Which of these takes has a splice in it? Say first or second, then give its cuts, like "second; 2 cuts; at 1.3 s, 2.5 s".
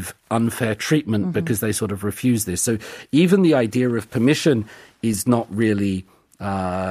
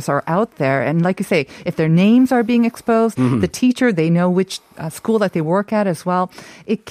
second; 1 cut; at 3.1 s